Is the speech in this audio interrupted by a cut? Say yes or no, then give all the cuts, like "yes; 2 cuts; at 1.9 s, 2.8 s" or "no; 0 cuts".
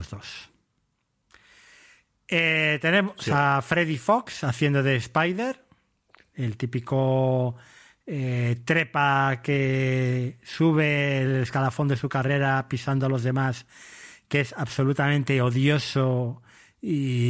no; 0 cuts